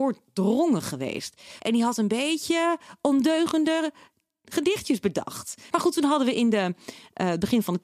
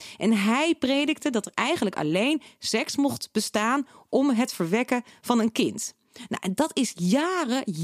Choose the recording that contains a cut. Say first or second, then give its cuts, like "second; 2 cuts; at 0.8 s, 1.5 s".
first; 2 cuts; at 1.6 s, 5.7 s